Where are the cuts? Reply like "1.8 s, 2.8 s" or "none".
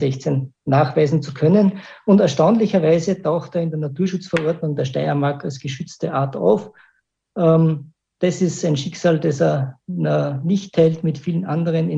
none